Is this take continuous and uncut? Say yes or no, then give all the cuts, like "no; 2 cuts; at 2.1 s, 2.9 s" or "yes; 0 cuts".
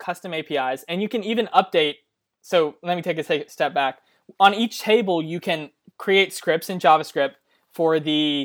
yes; 0 cuts